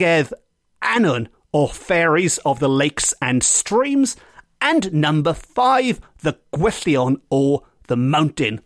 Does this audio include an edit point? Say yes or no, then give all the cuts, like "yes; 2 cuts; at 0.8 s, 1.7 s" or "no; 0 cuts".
no; 0 cuts